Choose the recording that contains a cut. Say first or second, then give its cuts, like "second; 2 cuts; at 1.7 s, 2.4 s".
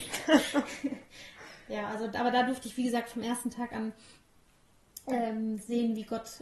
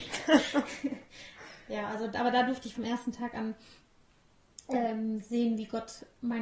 second; 1 cut; at 2.7 s